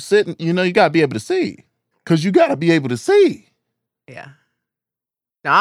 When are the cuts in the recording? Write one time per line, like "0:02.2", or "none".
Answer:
0:01.9